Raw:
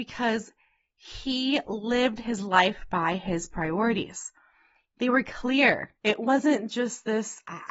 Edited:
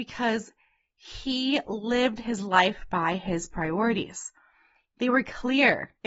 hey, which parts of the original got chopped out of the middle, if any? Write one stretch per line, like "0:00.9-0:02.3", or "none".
none